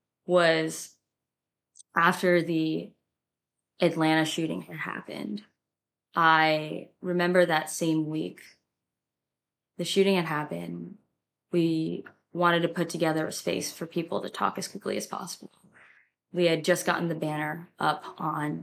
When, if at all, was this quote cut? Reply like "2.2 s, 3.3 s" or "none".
none